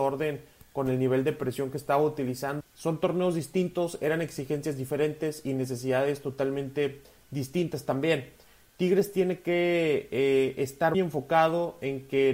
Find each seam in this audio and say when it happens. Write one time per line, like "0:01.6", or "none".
0:02.6
0:10.9